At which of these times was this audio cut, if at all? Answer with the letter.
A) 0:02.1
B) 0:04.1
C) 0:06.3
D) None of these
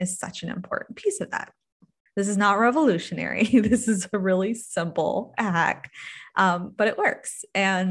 A